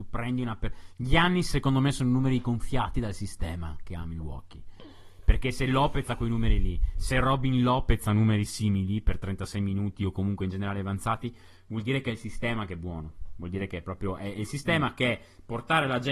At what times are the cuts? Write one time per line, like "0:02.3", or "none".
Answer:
none